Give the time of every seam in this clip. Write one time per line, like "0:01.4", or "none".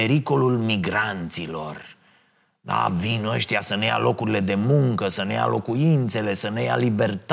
none